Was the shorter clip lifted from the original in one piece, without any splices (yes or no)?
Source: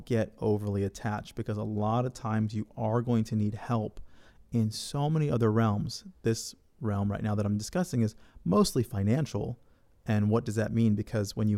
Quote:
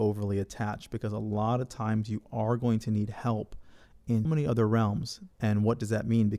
no